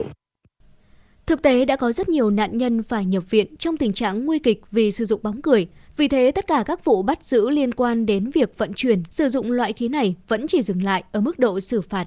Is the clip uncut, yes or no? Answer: no